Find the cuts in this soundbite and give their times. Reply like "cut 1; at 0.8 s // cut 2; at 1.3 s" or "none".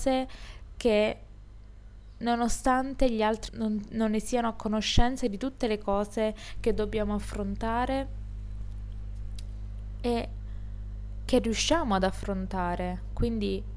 cut 1; at 3.5 s